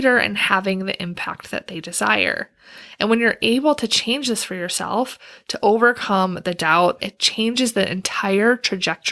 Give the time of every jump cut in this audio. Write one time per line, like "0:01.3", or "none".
0:07.0